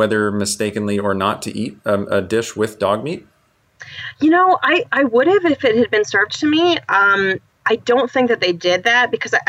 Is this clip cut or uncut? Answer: uncut